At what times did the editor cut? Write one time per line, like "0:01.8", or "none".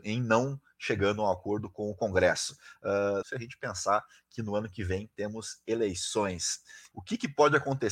0:03.2
0:06.9